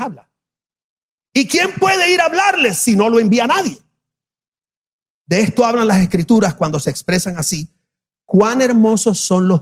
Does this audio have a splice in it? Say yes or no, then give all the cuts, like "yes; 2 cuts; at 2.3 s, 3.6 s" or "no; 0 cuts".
no; 0 cuts